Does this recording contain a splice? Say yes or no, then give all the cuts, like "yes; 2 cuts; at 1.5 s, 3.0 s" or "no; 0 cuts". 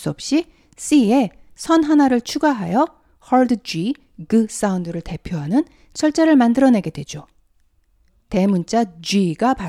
no; 0 cuts